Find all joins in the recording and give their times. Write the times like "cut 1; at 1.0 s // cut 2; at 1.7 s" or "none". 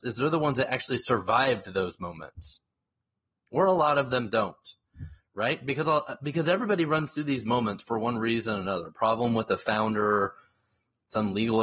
none